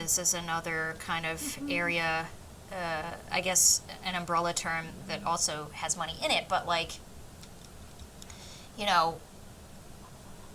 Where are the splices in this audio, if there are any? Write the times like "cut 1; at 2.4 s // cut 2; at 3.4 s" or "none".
none